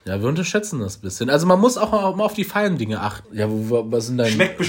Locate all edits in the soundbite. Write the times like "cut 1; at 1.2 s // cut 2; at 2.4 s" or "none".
cut 1; at 3.2 s

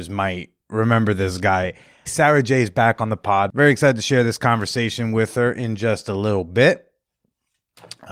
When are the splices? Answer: cut 1; at 2.1 s

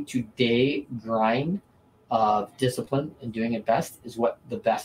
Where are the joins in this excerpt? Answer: none

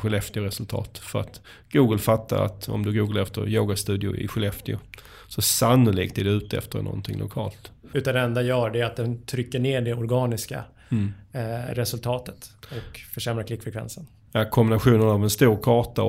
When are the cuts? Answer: cut 1; at 7.9 s

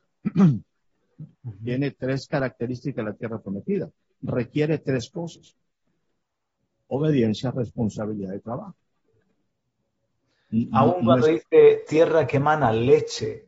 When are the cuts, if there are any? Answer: cut 1; at 1.3 s

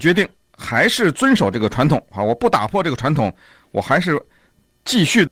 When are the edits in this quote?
none

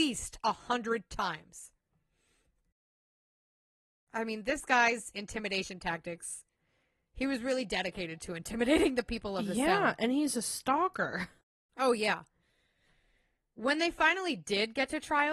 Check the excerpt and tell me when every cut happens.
none

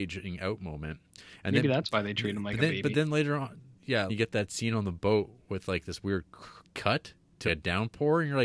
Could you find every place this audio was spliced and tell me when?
cut 1; at 4.1 s // cut 2; at 7.5 s

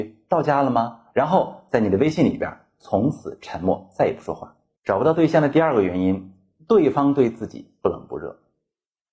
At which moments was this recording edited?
cut 1; at 4.8 s

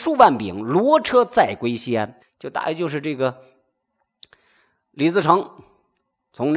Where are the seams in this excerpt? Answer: cut 1; at 2.2 s

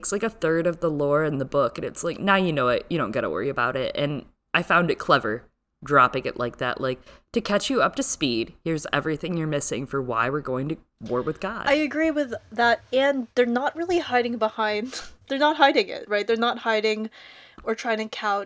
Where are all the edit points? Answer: none

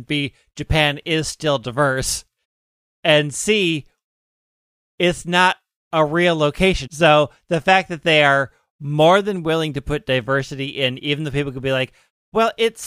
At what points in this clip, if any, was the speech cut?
cut 1; at 6.9 s

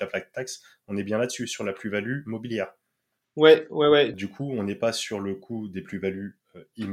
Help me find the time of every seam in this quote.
cut 1; at 4.1 s

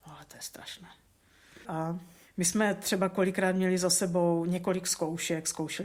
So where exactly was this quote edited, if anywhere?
cut 1; at 1.6 s

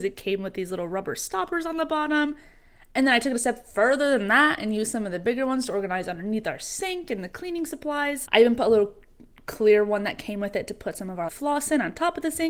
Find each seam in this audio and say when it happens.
cut 1; at 8.3 s // cut 2; at 11.3 s

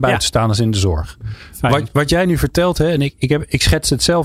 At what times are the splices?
none

